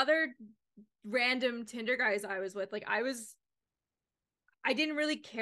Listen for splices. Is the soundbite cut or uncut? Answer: uncut